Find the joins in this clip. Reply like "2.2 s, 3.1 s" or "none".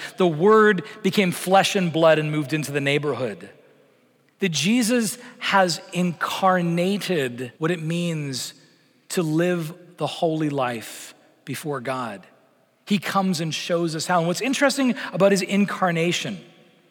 7.5 s